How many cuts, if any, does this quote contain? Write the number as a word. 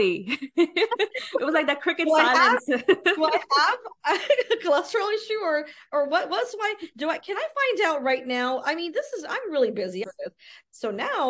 one